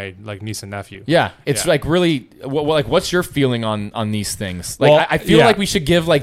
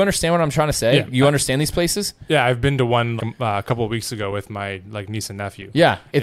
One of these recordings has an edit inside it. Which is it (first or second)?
second